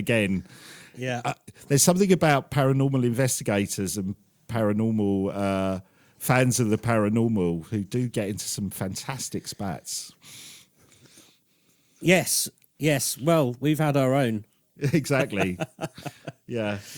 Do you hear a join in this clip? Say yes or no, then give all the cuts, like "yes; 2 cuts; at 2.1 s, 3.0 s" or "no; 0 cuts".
yes; 1 cut; at 14.6 s